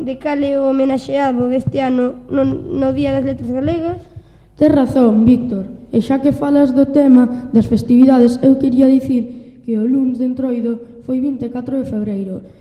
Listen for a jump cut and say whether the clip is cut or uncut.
uncut